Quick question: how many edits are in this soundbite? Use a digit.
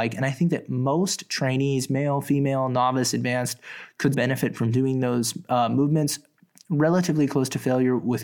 1